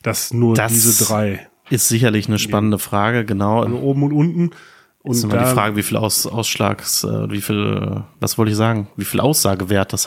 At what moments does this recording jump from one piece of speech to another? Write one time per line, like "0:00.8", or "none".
0:03.7